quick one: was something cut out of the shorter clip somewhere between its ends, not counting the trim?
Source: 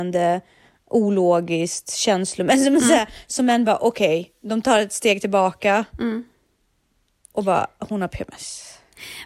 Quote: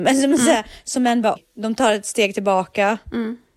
yes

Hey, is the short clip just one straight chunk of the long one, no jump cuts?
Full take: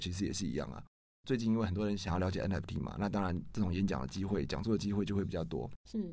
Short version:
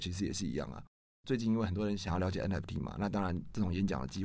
yes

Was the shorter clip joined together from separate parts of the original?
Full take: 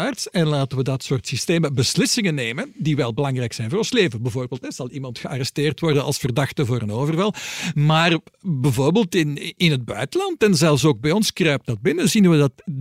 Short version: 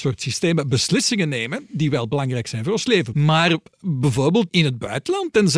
yes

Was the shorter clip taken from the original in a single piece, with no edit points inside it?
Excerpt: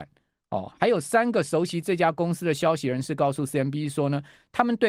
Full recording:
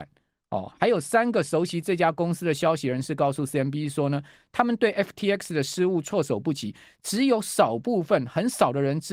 yes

